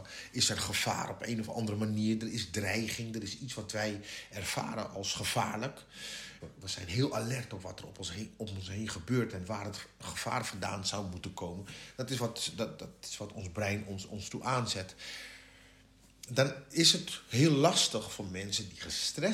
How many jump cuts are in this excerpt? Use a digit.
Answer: 1